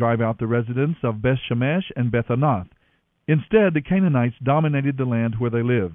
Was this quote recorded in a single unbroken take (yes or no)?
yes